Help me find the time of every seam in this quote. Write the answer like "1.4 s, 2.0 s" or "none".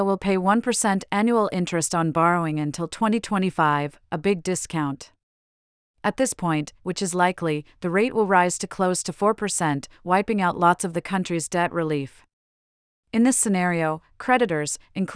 6.8 s